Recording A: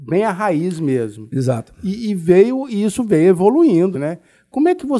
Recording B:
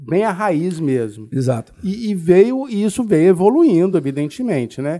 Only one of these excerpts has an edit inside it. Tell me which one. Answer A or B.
A